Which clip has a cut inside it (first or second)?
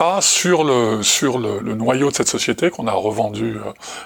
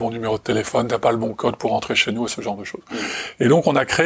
first